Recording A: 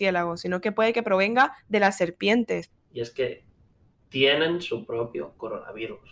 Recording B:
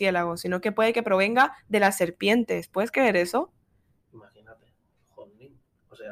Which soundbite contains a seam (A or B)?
A